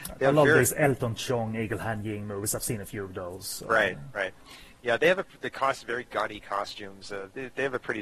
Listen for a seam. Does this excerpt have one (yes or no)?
no